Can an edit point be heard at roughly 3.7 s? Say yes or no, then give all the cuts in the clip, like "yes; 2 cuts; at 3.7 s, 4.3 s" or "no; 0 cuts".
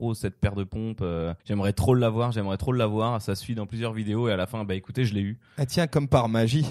no; 1 cut; at 1.4 s